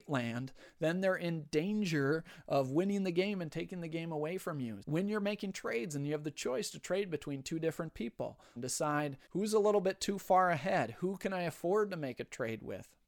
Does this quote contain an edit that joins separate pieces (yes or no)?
yes